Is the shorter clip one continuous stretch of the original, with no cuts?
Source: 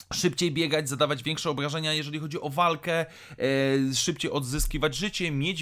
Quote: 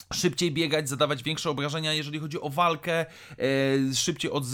yes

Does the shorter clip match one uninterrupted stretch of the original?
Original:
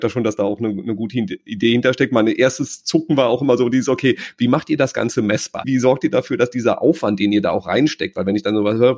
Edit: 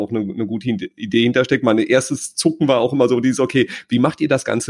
yes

